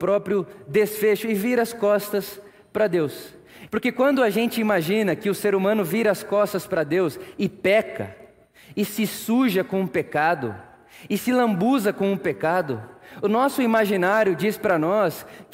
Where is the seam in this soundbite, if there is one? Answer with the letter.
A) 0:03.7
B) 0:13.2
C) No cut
A